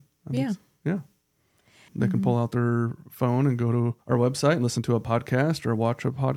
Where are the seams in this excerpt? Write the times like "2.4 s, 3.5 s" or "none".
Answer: 1.9 s, 4.0 s